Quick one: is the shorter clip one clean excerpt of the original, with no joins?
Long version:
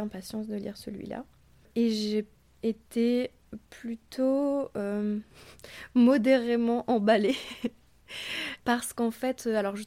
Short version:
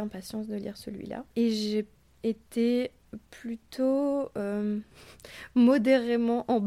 no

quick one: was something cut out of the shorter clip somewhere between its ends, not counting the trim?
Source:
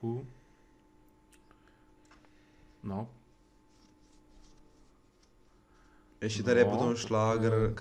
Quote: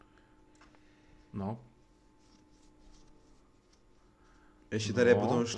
no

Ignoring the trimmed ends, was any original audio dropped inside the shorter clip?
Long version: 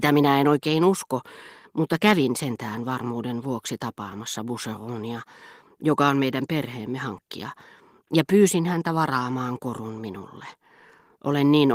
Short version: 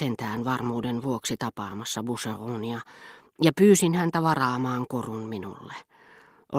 yes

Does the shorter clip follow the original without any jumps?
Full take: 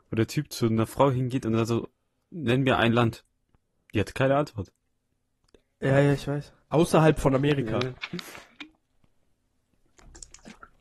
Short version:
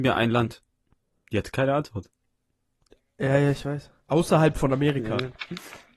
yes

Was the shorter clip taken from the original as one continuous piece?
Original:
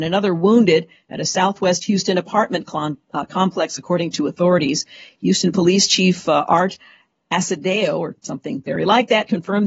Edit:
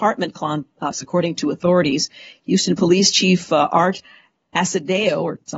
no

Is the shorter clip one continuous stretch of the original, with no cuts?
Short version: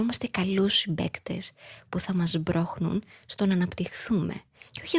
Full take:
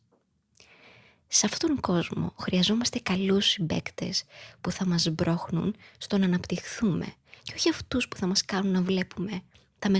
yes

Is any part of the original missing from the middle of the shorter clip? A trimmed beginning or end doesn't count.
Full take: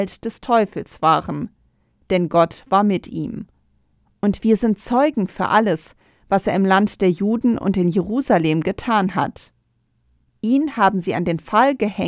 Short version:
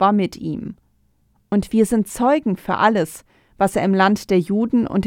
no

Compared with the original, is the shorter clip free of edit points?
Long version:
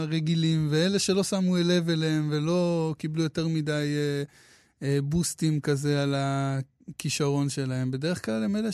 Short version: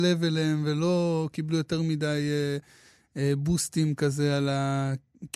yes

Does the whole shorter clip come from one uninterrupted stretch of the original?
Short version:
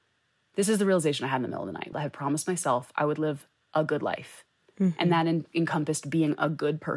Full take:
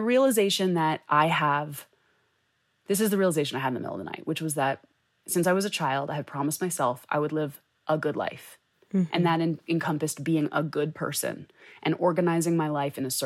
no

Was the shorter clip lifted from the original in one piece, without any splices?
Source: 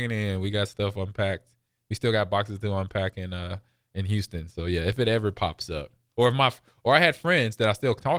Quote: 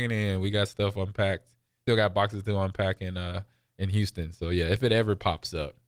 no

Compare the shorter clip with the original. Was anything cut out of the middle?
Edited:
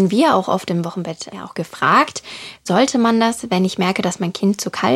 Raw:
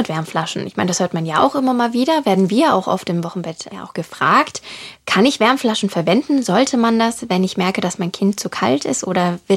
yes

